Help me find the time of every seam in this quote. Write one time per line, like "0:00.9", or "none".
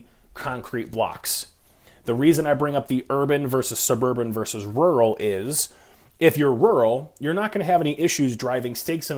none